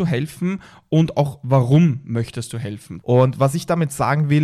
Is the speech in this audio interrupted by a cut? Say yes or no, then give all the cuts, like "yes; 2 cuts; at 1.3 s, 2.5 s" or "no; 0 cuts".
yes; 1 cut; at 3.0 s